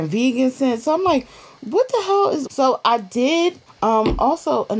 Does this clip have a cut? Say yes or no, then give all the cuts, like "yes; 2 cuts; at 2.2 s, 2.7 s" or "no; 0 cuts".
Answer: yes; 2 cuts; at 2.4 s, 3.7 s